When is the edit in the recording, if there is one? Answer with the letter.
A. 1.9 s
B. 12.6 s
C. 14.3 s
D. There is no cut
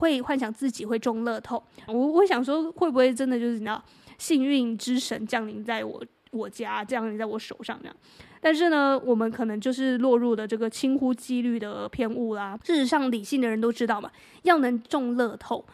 A